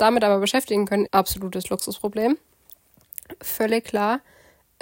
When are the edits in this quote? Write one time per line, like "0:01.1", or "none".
0:01.1